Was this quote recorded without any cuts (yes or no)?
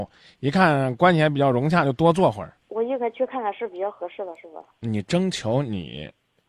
no